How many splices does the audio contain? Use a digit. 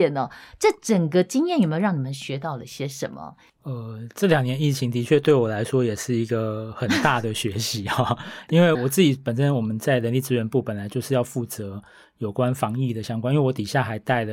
2